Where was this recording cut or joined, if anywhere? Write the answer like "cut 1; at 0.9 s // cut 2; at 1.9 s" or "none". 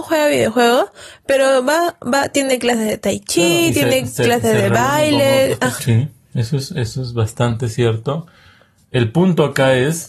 cut 1; at 5.8 s